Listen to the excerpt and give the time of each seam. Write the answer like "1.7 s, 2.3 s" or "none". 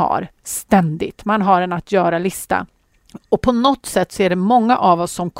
none